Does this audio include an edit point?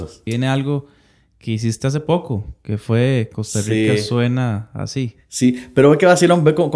no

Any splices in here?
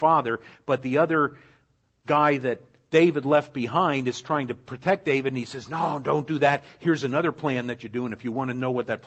no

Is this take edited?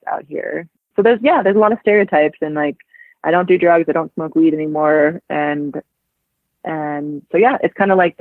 no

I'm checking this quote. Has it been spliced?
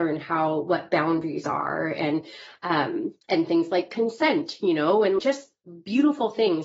yes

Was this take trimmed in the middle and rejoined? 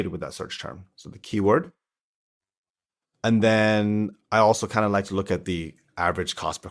no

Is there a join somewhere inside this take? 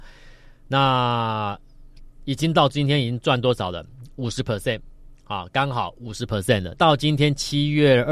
yes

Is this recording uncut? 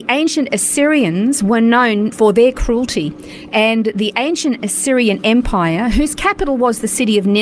no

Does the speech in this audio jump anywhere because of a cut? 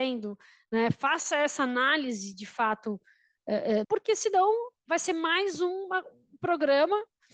yes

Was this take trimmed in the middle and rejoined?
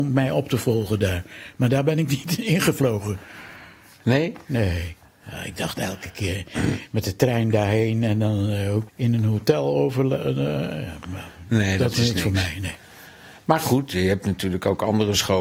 yes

